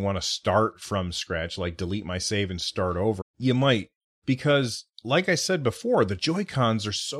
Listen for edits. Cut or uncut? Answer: cut